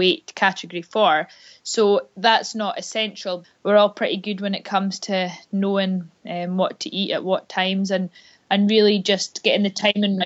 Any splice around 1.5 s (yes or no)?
no